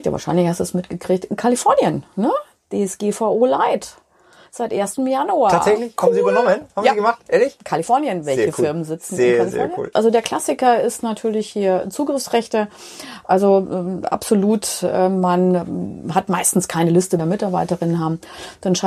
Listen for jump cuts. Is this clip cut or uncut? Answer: cut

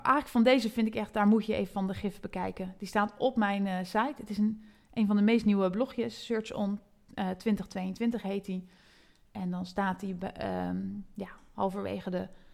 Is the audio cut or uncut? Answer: uncut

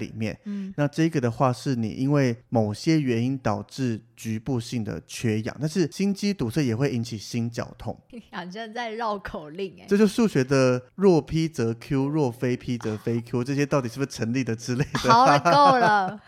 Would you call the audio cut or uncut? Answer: cut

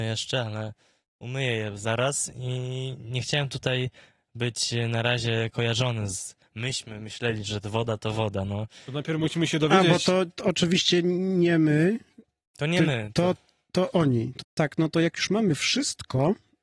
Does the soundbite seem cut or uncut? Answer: cut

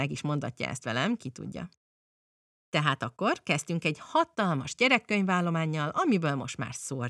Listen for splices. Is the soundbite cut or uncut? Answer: uncut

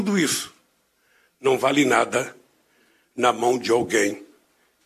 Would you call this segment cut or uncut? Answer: uncut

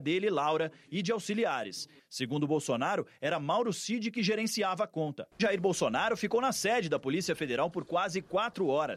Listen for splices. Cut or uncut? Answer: cut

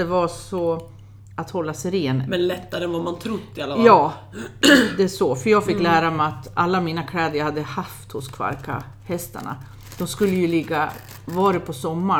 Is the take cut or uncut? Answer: cut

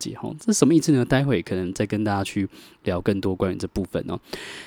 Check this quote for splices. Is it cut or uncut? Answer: uncut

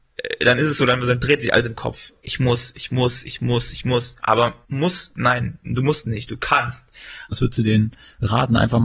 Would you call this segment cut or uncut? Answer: cut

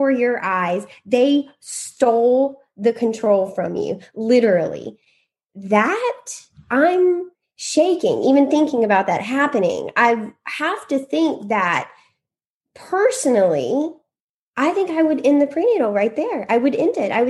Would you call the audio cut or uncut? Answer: uncut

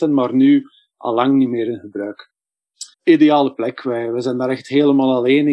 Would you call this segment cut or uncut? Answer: cut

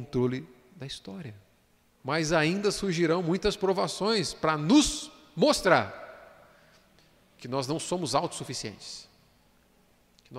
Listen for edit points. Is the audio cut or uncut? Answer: cut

